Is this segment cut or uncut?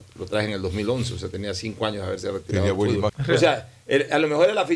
cut